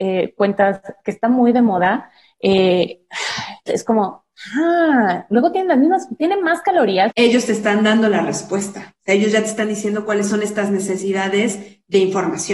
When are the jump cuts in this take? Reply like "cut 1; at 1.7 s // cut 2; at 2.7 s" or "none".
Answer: cut 1; at 3.7 s // cut 2; at 7.1 s